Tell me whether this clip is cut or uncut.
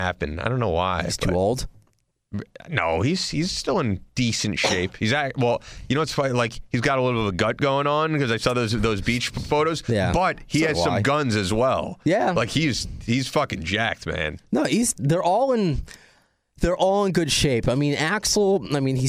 uncut